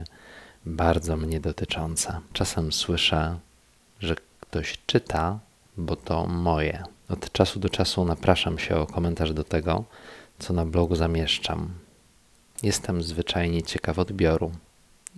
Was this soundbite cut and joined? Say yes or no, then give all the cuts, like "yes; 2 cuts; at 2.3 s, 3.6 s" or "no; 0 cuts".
no; 0 cuts